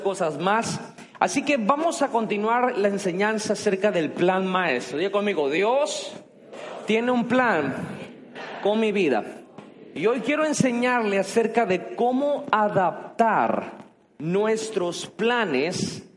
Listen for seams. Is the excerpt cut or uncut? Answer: uncut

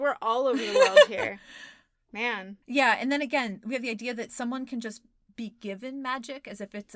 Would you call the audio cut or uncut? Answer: cut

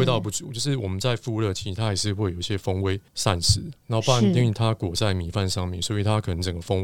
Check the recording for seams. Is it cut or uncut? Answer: cut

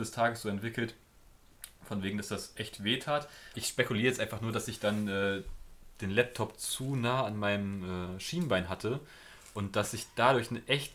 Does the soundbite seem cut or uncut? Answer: cut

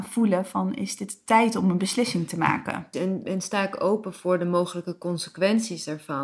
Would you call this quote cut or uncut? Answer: cut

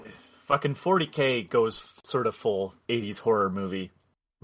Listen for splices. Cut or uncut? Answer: cut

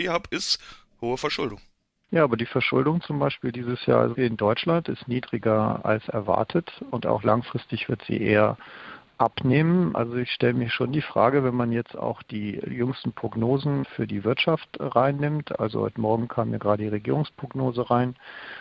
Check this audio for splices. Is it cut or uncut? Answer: uncut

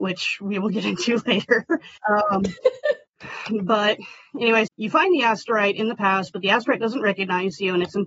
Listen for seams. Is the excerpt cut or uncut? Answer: cut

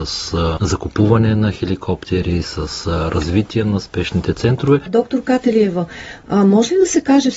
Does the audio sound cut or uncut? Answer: uncut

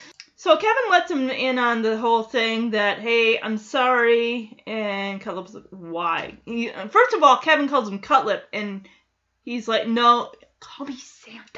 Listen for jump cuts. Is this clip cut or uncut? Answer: uncut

